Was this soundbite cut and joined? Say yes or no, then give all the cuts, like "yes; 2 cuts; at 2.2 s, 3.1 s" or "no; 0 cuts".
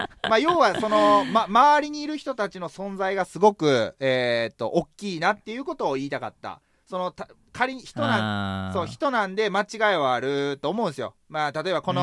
no; 0 cuts